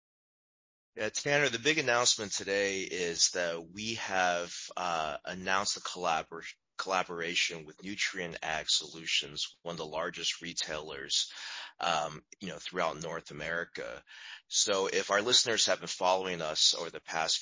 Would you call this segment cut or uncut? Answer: uncut